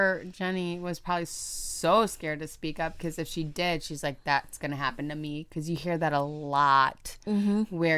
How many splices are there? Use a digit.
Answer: 0